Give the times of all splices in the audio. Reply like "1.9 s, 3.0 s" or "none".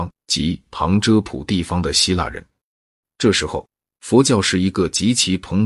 3.0 s